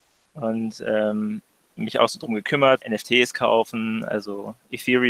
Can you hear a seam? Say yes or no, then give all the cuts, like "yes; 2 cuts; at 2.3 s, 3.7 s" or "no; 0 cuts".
yes; 2 cuts; at 1.8 s, 2.8 s